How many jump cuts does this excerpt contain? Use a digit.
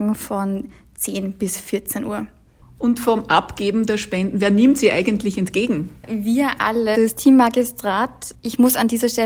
1